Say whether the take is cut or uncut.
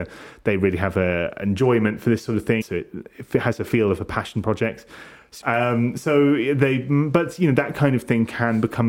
cut